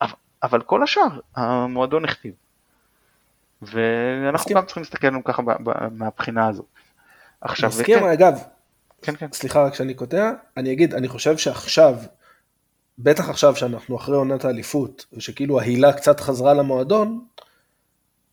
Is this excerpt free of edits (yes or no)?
yes